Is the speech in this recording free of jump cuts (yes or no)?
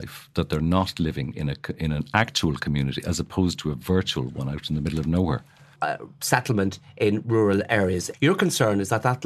no